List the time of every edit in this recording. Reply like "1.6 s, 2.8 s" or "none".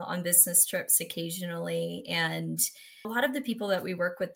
3.0 s